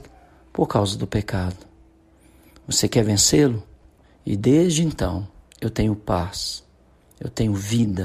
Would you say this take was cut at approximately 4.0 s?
yes; 1 cut; at 4.0 s

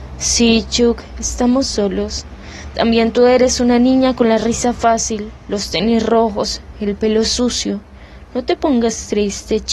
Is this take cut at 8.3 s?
no; 0 cuts

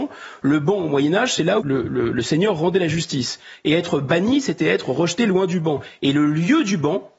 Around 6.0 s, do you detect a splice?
no; 1 cut; at 1.6 s

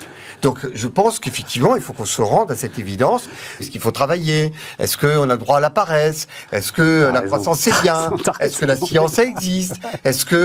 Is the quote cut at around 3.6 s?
yes; 1 cut; at 3.6 s

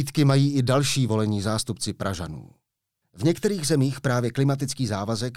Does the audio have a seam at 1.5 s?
no; 1 cut; at 3.0 s

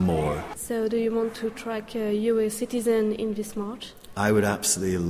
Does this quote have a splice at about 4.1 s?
yes; 1 cut; at 4.1 s

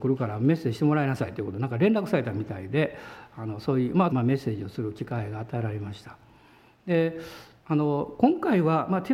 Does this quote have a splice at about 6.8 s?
no; 1 cut; at 4.1 s

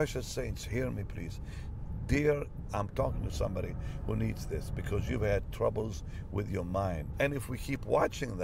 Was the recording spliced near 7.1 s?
yes; 2 cuts; at 2.7 s, 7.1 s

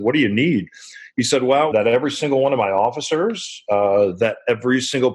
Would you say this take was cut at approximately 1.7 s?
yes; 1 cut; at 1.7 s

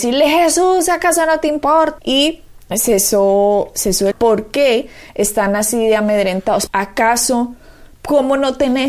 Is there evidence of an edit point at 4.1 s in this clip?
yes; 3 cuts; at 2.0 s, 4.1 s, 6.7 s

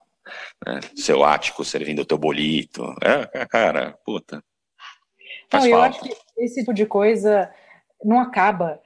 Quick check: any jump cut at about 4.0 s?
no; 1 cut; at 6.7 s

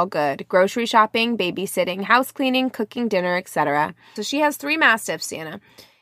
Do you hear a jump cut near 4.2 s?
yes; 1 cut; at 4.2 s

